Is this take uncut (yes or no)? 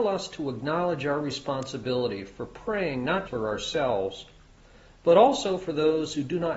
no